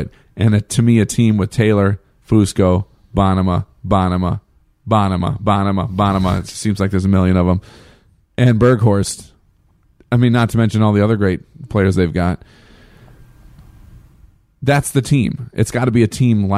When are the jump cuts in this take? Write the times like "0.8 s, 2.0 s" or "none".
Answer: none